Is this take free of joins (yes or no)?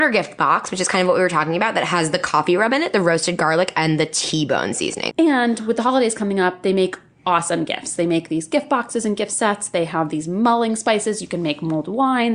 no